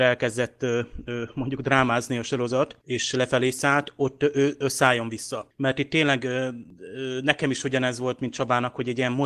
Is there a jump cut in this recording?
no; 0 cuts

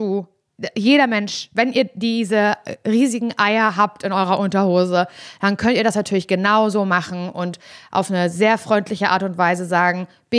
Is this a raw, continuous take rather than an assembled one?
yes; 0 cuts

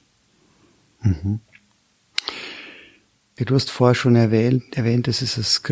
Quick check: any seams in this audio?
yes; 1 cut; at 3.4 s

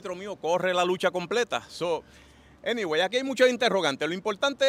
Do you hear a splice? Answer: no; 0 cuts

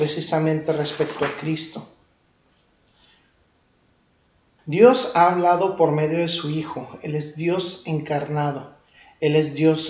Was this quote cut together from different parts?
yes; 1 cut; at 4.6 s

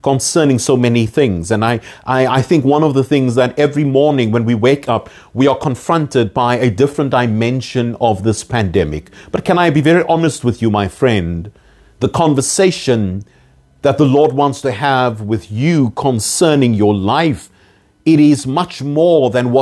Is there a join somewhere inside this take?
no; 0 cuts

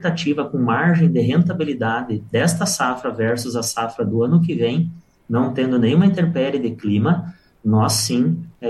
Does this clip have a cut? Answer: no; 0 cuts

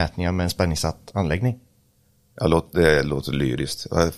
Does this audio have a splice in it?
no; 0 cuts

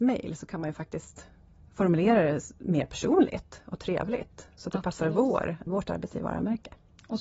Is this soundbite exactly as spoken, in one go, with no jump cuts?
no; 1 cut; at 5.7 s

